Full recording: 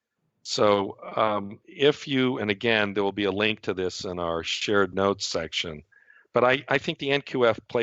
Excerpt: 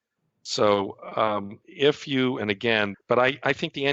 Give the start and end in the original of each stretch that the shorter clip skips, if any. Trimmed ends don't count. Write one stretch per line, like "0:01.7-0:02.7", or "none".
0:02.9-0:06.2